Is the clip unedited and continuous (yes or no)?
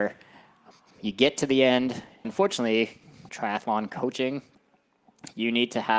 no